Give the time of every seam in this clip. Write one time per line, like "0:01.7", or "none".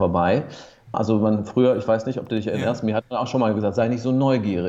0:00.9

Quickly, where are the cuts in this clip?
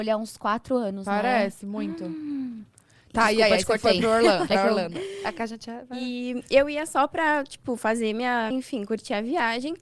0:08.5

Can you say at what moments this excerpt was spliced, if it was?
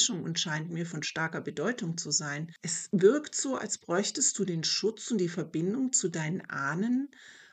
none

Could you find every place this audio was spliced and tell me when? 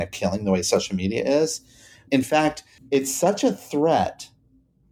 0:02.1

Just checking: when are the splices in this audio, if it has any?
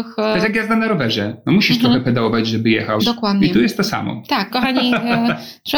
0:03.0
0:04.5

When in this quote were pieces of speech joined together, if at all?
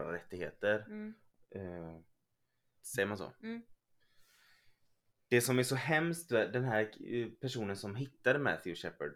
0:02.8

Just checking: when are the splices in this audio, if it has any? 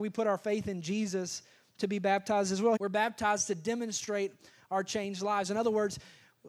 0:02.8

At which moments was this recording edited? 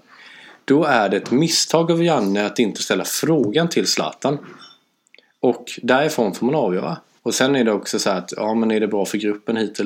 0:07.2

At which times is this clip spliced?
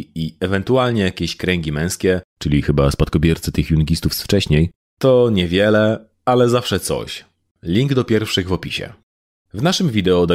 none

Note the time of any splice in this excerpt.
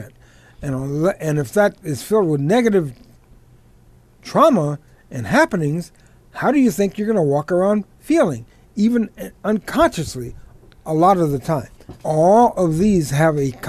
0:12.0

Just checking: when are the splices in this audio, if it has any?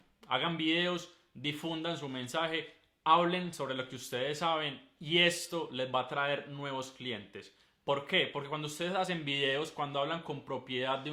none

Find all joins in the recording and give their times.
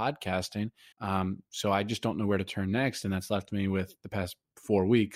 0:00.9

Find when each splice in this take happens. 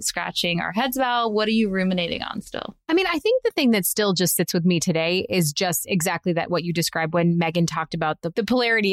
none

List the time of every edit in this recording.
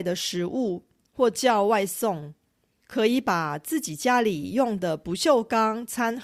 0:02.8

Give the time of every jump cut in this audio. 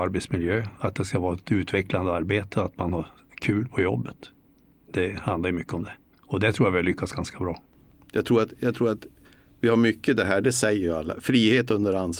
none

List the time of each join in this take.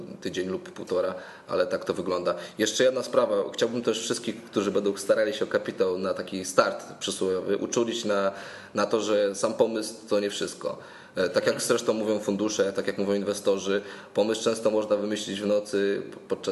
none

